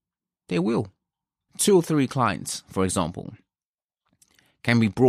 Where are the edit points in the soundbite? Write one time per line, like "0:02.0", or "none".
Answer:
0:01.5